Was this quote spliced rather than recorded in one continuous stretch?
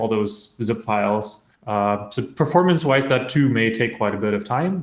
yes; 1 cut; at 1.5 s

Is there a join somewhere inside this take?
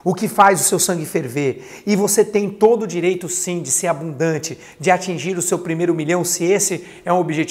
no; 0 cuts

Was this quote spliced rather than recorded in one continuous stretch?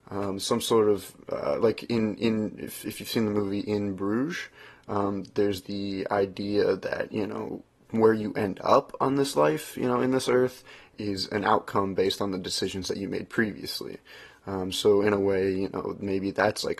no; 0 cuts

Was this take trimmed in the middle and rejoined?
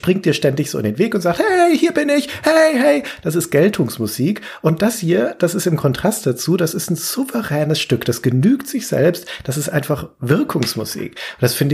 no; 0 cuts

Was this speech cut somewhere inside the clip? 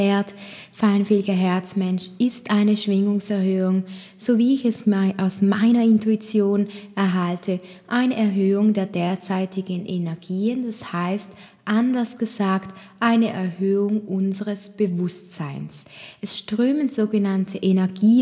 no; 0 cuts

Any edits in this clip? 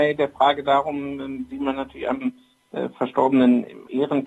no; 0 cuts

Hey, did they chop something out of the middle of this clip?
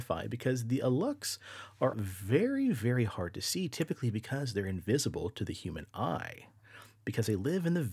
yes; 1 cut; at 1.9 s

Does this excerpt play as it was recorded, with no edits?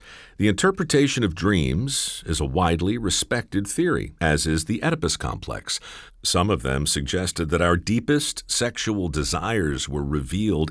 no; 2 cuts; at 4.2 s, 6.1 s

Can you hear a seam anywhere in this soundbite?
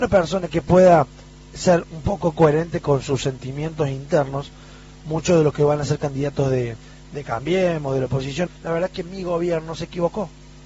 yes; 1 cut; at 8.5 s

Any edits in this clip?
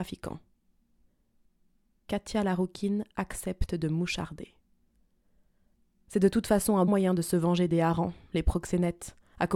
yes; 1 cut; at 6.9 s

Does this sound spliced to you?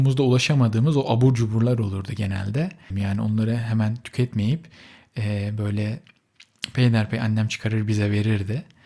yes; 1 cut; at 2.9 s

